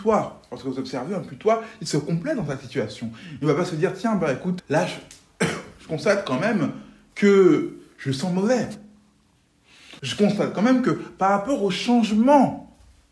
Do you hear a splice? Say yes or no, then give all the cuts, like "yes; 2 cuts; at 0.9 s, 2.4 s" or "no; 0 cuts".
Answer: yes; 2 cuts; at 4.6 s, 10.0 s